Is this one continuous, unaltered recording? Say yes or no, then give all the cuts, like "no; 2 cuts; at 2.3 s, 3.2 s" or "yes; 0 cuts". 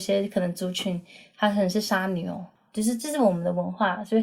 yes; 0 cuts